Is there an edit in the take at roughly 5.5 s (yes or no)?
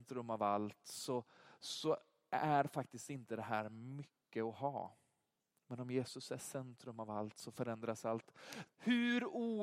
no